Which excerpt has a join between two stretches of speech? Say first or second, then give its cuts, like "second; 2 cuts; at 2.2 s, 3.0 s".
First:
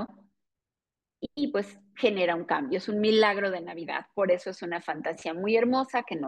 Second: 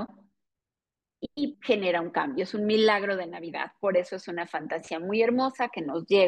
second; 1 cut; at 1.5 s